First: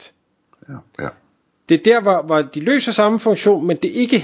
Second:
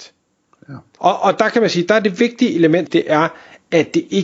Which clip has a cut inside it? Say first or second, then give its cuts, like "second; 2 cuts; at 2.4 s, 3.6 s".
second; 2 cuts; at 1.0 s, 2.9 s